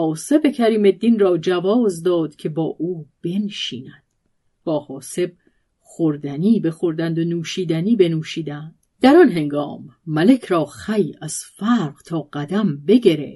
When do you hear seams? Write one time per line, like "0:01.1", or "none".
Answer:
0:04.5
0:08.9